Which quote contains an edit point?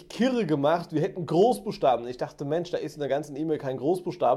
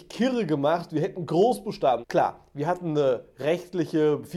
second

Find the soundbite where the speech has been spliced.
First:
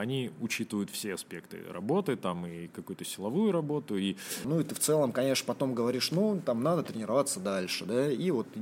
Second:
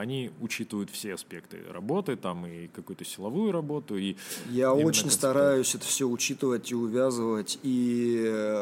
first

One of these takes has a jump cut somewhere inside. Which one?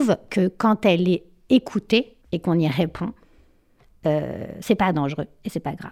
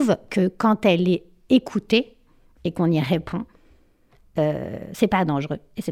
first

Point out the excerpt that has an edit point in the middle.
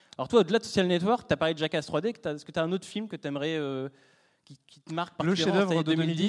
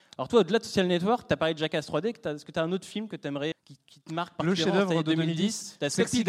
second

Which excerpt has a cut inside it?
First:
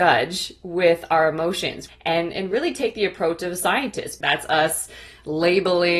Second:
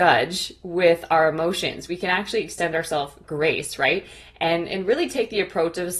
first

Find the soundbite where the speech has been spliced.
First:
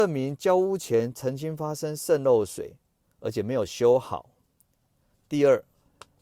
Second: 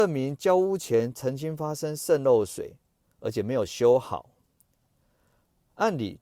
first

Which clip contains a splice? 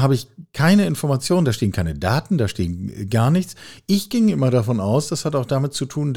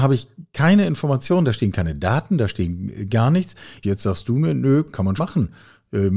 second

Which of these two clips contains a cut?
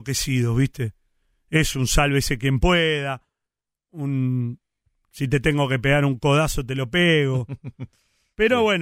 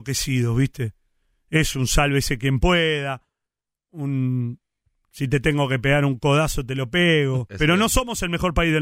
second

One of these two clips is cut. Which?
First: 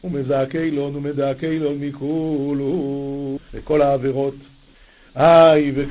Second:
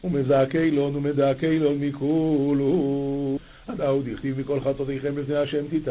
first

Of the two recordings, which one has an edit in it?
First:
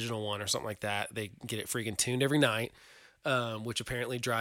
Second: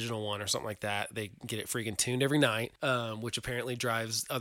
second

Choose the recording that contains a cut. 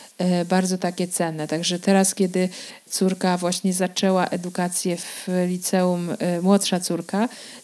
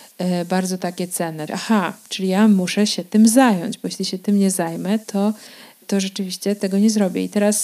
second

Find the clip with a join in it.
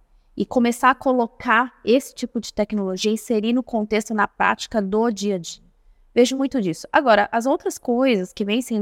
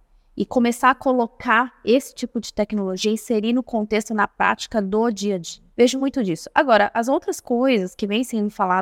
second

